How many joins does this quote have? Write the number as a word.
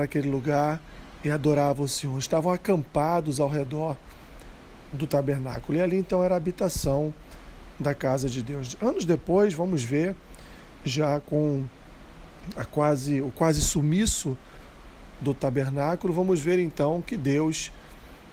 zero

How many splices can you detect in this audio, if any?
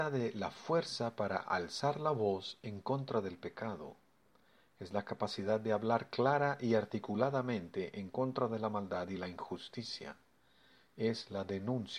zero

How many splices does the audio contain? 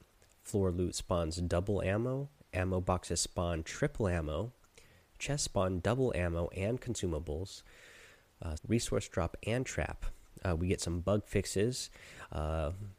one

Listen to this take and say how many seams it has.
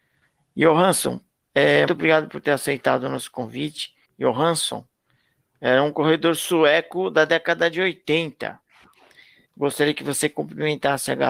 three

